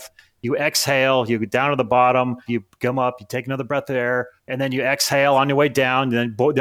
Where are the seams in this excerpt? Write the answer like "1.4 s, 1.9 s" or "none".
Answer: 2.5 s, 4.4 s